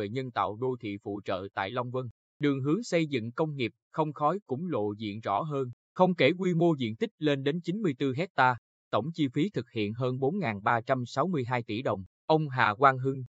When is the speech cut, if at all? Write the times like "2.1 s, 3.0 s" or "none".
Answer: 5.8 s, 12.1 s